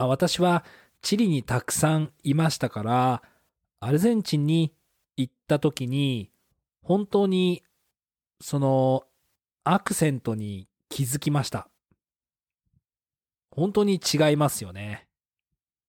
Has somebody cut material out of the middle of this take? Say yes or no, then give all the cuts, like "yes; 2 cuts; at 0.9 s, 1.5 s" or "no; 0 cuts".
no; 0 cuts